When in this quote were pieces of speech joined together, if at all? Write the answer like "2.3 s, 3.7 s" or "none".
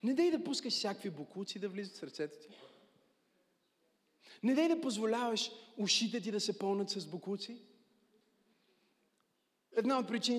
none